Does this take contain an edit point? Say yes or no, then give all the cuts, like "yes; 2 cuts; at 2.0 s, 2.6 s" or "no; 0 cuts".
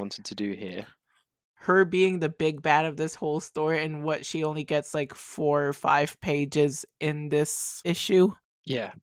yes; 1 cut; at 1.4 s